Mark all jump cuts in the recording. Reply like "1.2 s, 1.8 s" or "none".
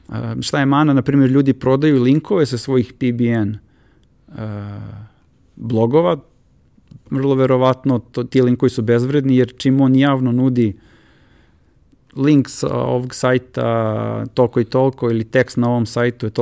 none